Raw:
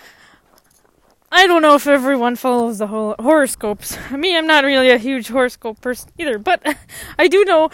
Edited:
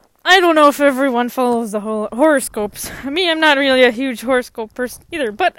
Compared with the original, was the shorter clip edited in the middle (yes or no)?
no